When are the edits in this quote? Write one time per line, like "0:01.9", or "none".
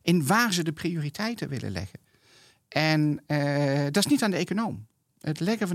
none